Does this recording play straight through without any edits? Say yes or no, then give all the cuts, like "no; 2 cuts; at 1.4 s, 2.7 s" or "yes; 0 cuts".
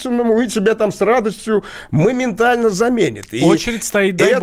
yes; 0 cuts